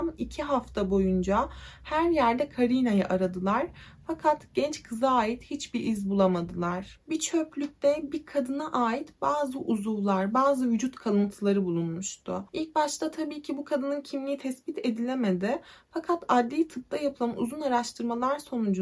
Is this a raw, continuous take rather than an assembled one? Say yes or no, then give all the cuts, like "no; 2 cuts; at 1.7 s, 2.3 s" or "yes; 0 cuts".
no; 2 cuts; at 7.0 s, 12.5 s